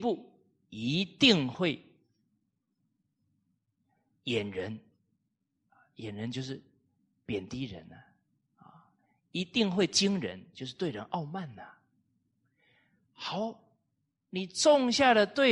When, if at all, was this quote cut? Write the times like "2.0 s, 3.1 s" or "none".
none